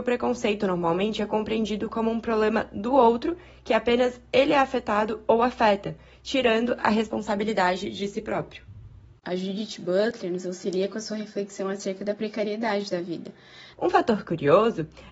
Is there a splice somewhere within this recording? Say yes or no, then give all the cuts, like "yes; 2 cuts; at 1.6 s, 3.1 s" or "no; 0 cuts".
yes; 2 cuts; at 9.2 s, 13.7 s